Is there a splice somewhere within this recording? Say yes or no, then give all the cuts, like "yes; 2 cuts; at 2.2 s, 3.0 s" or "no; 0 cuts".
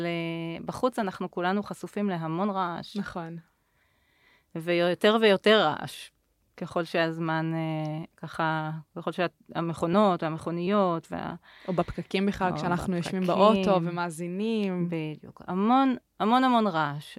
no; 0 cuts